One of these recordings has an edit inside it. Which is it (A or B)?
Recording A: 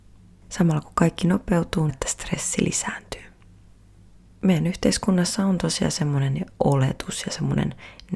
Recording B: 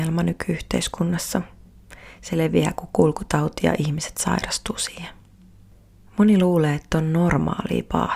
A